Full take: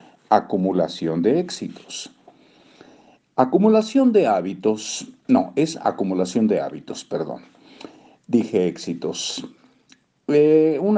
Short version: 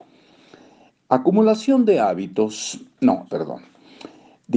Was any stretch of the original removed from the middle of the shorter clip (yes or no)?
yes